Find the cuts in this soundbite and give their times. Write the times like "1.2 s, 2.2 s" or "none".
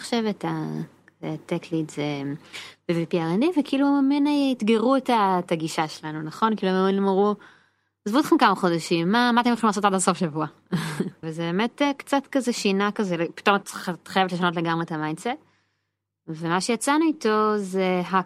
11.2 s

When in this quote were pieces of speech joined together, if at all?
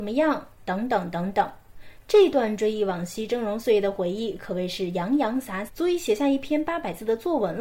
5.7 s

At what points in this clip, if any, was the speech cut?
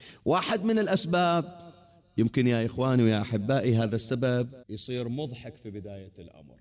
4.6 s

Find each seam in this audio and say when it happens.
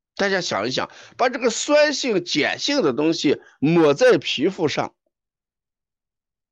none

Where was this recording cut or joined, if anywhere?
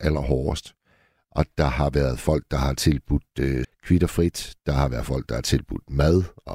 3.6 s

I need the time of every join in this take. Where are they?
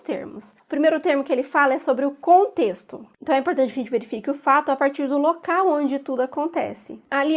3.1 s

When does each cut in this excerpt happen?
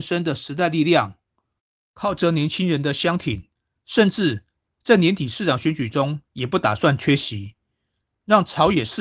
3.8 s

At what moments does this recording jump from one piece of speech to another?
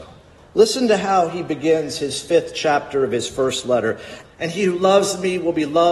4.2 s

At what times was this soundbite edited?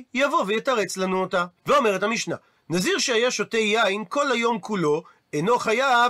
1.6 s

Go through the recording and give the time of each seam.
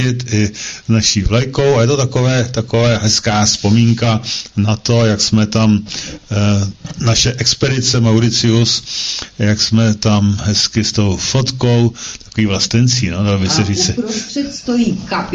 none

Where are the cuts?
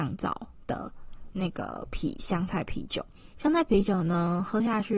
3.3 s

